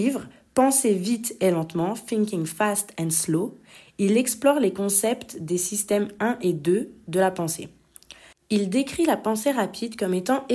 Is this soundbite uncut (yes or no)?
yes